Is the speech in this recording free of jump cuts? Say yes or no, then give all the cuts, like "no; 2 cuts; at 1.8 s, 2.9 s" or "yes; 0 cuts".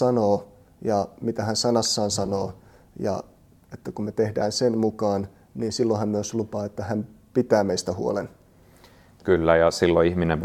yes; 0 cuts